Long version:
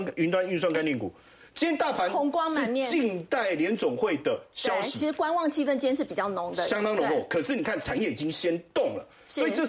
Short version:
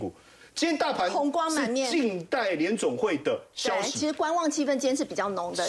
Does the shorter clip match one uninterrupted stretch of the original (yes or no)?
yes